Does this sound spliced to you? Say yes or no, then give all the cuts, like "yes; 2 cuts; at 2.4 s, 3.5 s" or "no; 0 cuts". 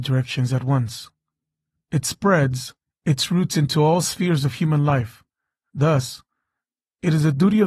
yes; 1 cut; at 5.7 s